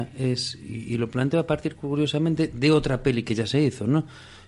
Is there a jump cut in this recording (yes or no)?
no